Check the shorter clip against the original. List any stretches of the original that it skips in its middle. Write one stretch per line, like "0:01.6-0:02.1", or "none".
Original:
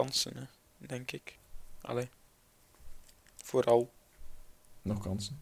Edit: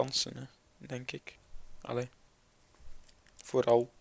none